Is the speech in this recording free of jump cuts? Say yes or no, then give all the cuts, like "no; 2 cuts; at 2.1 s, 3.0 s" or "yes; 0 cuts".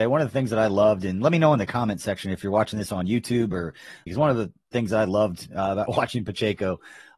no; 1 cut; at 4.1 s